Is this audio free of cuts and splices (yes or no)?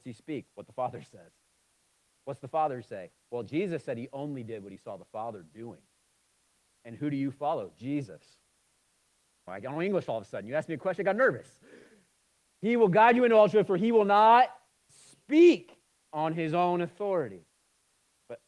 no